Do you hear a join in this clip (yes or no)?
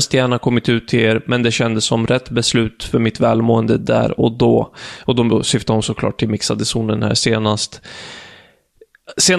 no